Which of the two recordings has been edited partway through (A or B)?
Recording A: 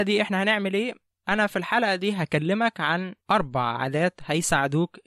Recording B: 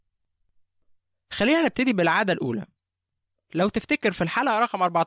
A